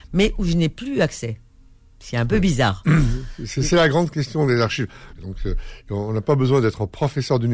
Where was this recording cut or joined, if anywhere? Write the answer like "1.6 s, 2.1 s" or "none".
5.2 s